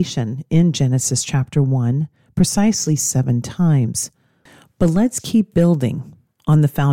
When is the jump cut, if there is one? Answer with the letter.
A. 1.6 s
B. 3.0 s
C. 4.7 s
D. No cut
D